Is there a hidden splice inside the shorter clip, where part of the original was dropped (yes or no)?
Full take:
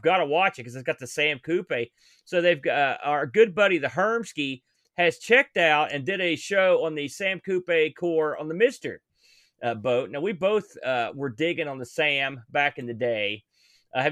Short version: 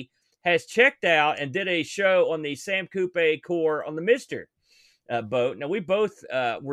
no